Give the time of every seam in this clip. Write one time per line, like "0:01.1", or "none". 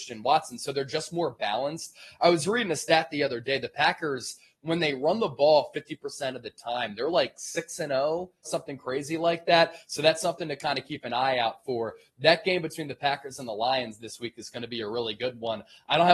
0:08.4